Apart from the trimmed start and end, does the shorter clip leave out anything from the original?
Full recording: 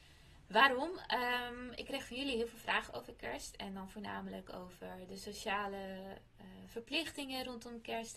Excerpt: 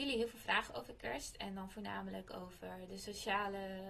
no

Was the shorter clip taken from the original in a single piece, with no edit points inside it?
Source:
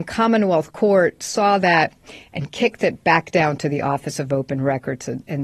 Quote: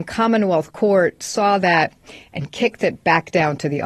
yes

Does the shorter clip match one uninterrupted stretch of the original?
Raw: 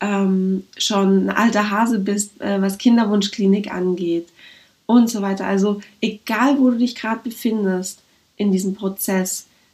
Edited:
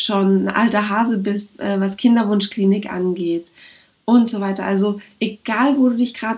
yes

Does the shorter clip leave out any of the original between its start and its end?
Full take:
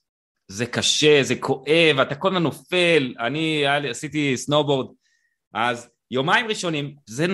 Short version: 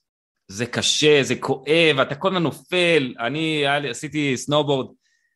no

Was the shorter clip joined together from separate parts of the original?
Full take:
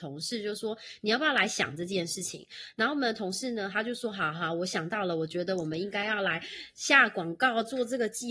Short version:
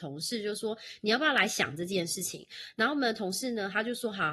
no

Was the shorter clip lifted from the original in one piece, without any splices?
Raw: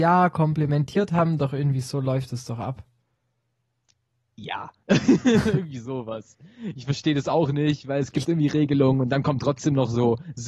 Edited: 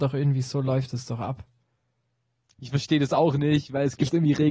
no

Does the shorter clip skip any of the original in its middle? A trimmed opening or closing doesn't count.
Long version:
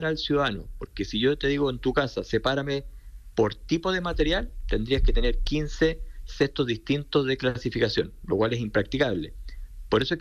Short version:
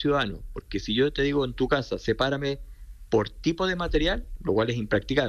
yes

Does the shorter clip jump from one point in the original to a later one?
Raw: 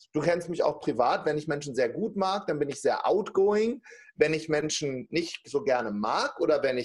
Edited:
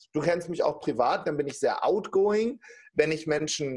yes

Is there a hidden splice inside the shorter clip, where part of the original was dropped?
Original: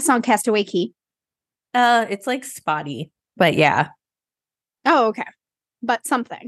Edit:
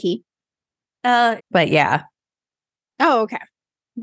yes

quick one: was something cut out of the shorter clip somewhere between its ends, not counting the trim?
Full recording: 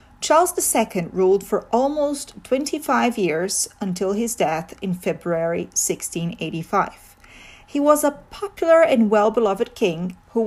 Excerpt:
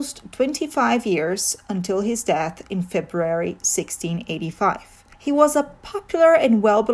yes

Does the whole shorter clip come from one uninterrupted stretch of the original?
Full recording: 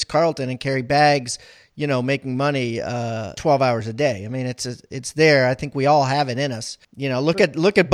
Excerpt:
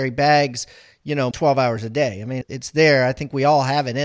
no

